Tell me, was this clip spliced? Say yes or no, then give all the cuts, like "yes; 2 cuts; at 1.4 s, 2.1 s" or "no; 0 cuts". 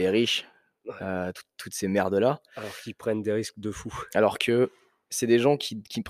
no; 0 cuts